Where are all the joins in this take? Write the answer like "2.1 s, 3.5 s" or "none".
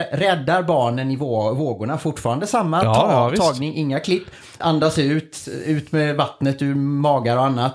4.6 s